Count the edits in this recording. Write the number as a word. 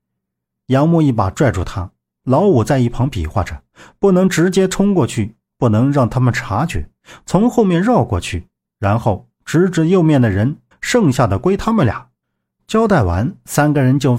one